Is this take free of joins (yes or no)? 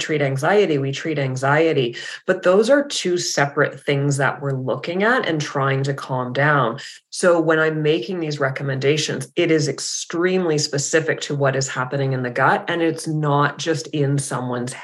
yes